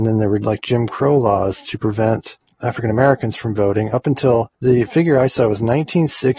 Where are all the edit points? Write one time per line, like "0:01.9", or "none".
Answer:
none